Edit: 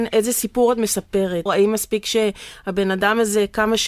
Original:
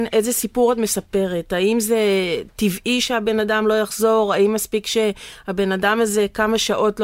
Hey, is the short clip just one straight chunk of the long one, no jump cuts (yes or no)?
no